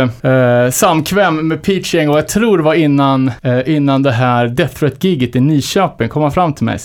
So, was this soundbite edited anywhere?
no; 0 cuts

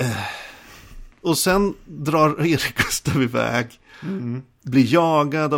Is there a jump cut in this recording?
no; 0 cuts

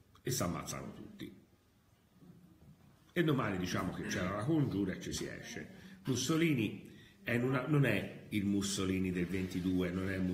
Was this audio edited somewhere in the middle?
no; 0 cuts

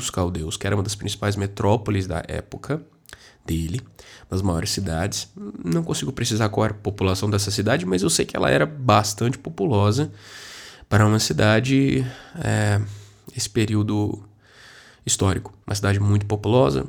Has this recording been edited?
yes; 1 cut; at 15.6 s

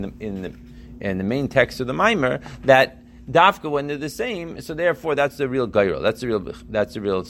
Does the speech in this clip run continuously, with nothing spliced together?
yes; 0 cuts

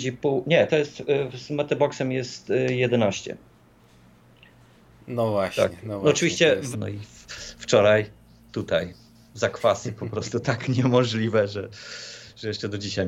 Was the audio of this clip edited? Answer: yes; 1 cut; at 6.7 s

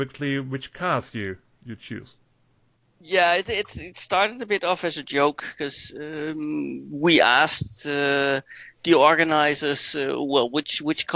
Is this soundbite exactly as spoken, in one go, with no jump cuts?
yes; 0 cuts

